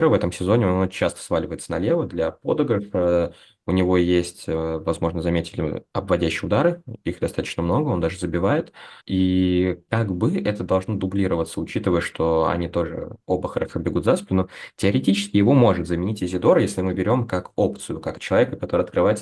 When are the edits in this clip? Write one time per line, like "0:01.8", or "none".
0:09.0